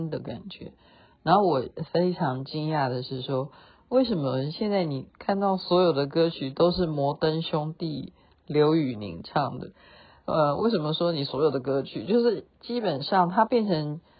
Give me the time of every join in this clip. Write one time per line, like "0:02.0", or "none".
none

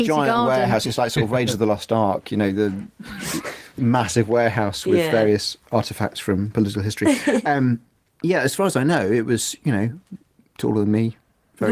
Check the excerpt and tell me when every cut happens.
none

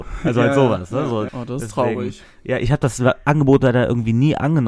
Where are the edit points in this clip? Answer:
0:01.3

